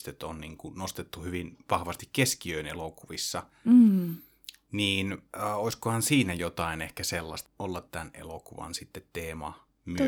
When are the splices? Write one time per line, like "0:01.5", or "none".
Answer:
0:05.3
0:07.5